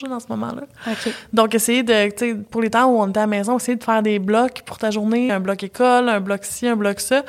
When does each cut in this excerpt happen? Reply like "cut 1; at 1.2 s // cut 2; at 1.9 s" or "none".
cut 1; at 5.3 s